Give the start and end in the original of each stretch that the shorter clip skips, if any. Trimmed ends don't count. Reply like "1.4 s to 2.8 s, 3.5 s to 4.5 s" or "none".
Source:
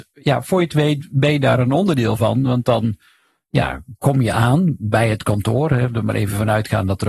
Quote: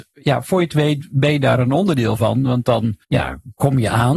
3.0 s to 3.5 s